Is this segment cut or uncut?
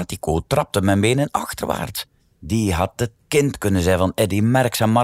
cut